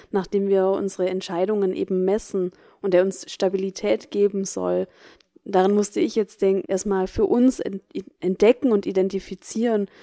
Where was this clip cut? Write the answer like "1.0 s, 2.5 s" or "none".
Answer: 6.6 s